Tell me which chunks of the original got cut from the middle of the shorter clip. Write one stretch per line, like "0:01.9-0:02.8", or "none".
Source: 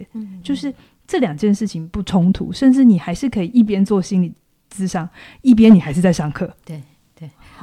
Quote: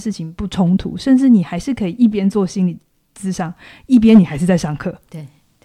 none